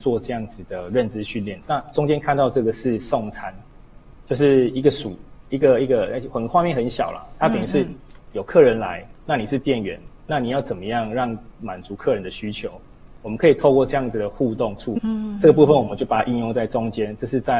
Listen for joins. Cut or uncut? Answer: cut